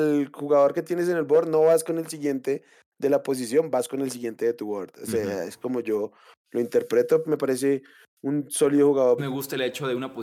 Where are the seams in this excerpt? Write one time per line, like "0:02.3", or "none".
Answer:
0:07.2
0:09.2